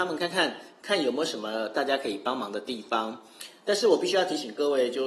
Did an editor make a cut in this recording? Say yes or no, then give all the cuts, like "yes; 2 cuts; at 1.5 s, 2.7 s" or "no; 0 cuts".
no; 0 cuts